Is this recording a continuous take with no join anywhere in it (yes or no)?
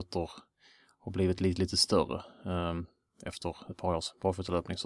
yes